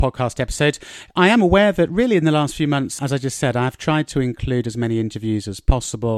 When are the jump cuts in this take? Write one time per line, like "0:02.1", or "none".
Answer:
0:03.0